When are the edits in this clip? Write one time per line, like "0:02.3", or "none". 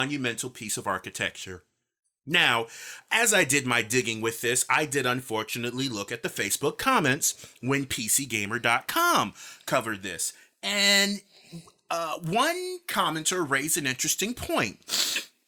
none